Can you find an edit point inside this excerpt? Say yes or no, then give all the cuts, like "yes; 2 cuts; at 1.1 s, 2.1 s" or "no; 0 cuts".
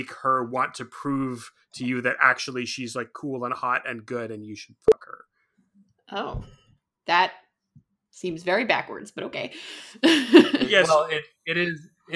no; 0 cuts